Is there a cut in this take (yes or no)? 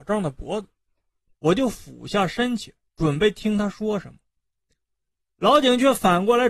yes